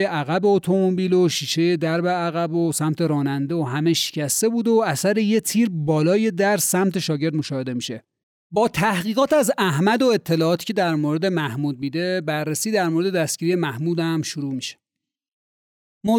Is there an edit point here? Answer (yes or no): yes